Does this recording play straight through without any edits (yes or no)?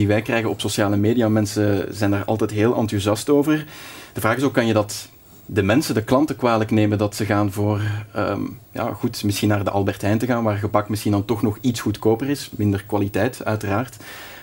yes